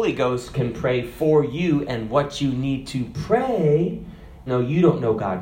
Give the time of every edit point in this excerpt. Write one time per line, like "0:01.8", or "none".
0:04.5

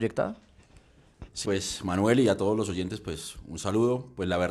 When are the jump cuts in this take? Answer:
0:01.4

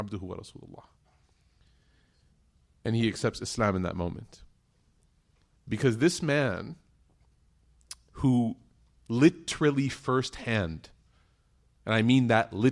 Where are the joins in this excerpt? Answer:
0:05.5

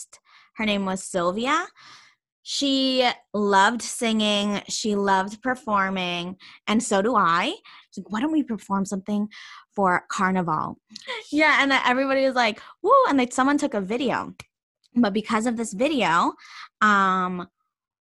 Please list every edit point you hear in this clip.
0:07.8
0:11.1

